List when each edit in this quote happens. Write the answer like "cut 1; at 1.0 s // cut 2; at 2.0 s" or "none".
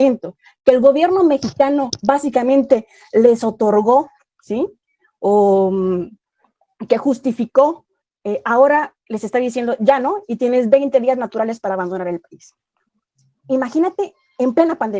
none